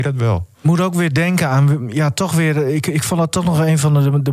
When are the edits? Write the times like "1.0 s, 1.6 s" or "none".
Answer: none